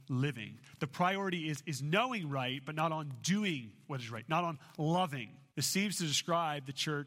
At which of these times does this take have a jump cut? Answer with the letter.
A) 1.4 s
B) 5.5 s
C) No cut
B